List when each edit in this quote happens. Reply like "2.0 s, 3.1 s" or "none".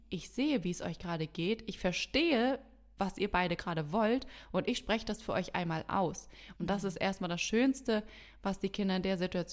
6.6 s